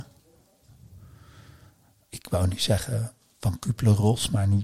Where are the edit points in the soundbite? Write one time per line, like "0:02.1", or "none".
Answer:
none